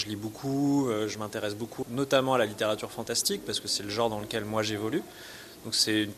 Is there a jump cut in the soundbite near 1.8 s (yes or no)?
yes